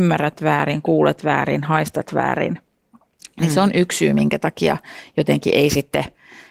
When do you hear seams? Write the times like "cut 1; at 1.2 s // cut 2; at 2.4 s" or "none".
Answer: none